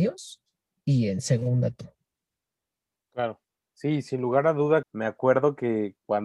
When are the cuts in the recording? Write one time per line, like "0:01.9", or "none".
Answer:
0:04.8